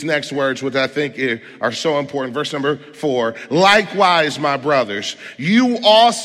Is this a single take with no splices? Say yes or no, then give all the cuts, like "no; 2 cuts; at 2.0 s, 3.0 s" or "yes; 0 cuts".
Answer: yes; 0 cuts